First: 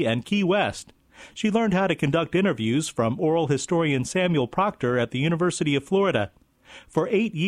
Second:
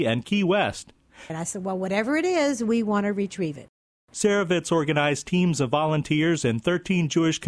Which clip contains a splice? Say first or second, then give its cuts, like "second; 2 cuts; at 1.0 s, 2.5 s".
second; 1 cut; at 1.3 s